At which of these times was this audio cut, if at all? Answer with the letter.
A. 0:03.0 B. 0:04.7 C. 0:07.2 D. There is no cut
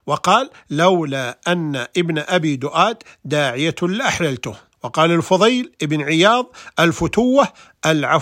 B